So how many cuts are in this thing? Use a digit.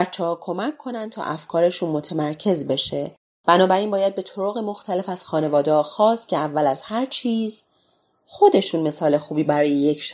1